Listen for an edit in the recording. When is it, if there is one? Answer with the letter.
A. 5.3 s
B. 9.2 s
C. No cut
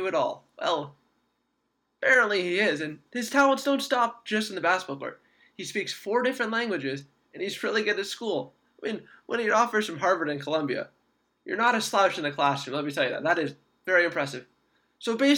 C